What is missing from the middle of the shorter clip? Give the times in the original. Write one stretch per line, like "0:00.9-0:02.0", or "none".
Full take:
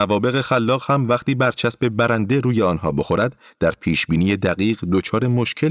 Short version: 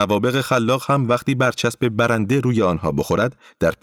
none